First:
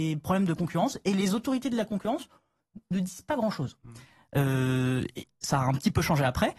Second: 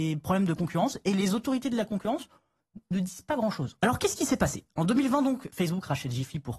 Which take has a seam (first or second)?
second